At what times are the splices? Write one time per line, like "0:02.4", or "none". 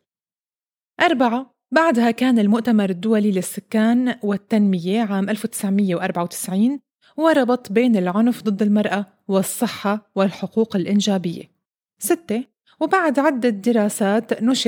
0:11.8